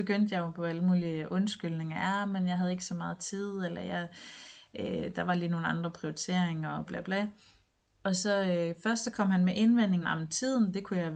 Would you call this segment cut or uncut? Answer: cut